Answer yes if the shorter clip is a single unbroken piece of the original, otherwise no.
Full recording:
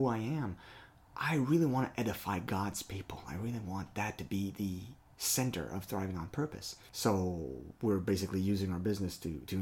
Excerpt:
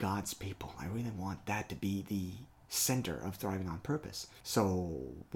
yes